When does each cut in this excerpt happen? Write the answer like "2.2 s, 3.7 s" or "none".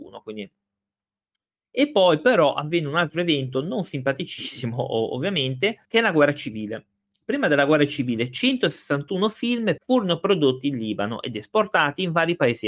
5.8 s, 9.8 s